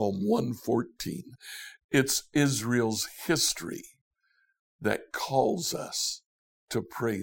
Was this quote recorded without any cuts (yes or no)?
yes